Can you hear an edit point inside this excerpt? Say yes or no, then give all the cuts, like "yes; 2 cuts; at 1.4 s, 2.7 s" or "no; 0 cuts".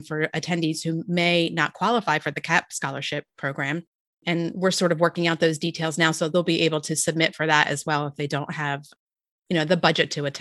no; 0 cuts